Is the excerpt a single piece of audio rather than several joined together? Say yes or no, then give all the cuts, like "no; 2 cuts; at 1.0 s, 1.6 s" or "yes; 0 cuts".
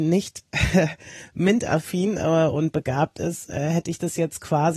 yes; 0 cuts